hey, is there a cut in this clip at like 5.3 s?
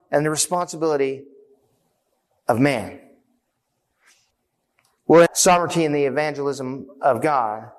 yes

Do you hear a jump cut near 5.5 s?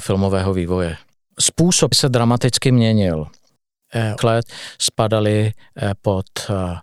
no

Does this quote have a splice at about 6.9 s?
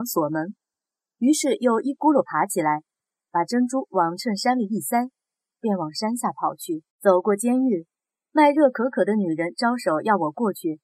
yes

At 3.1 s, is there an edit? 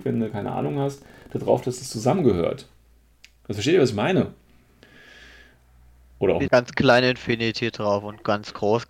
no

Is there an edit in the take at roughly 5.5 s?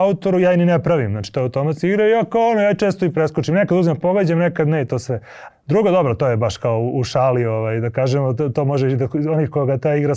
yes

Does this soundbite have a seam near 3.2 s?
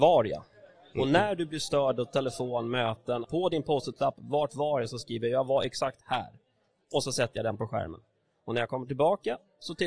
yes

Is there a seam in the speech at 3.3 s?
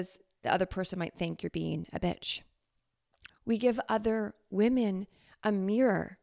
yes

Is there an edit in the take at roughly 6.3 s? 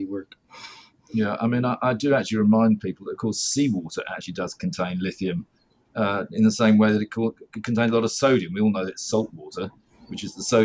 no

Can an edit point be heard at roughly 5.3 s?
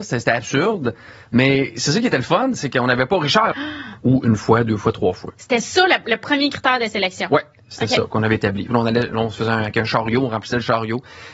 no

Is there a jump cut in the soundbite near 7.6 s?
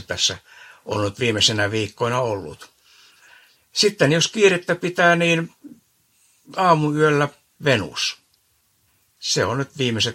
yes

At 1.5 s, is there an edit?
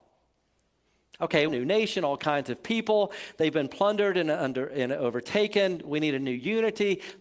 yes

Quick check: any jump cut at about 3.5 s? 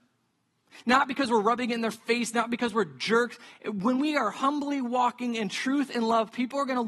no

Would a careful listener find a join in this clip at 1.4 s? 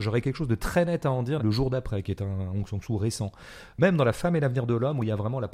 yes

